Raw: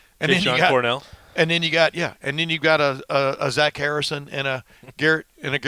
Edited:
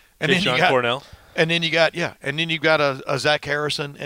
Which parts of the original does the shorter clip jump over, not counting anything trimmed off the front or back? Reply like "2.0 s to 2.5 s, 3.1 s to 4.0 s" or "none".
3.0 s to 3.4 s